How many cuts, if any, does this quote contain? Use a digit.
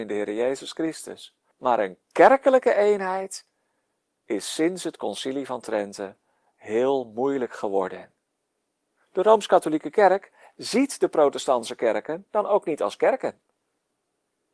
1